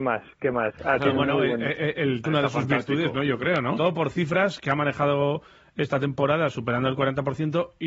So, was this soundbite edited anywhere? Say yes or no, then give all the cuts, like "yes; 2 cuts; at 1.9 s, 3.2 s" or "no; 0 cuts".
yes; 2 cuts; at 2.2 s, 3.8 s